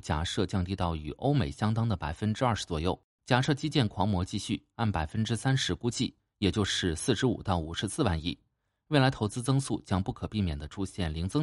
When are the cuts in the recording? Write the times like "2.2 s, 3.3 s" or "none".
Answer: 3.2 s